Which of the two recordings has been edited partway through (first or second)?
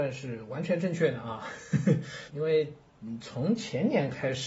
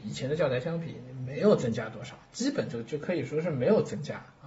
first